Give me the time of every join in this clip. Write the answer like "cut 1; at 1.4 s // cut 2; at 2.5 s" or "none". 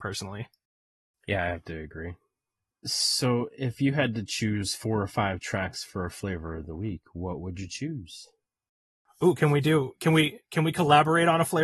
none